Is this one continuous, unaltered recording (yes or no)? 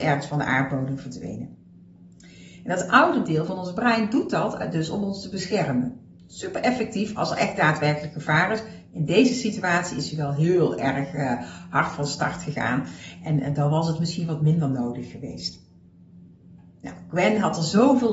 yes